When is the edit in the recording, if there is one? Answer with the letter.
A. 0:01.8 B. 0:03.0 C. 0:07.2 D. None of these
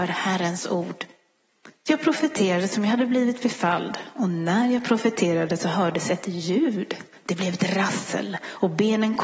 A